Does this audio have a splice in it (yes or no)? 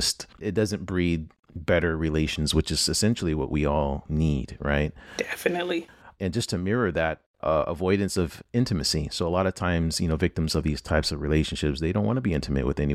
no